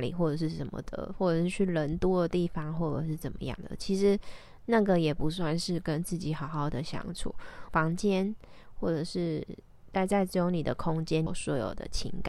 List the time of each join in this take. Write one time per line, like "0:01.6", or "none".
0:07.7
0:11.3